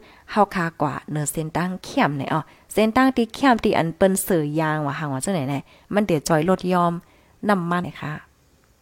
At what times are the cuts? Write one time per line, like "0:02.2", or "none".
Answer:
0:07.8